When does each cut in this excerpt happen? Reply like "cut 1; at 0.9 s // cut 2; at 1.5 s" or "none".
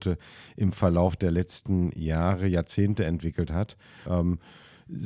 cut 1; at 4.1 s